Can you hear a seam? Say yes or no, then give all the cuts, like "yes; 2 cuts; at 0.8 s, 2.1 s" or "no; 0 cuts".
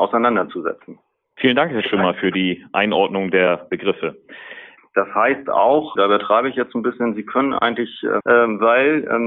yes; 3 cuts; at 4.8 s, 6.0 s, 8.2 s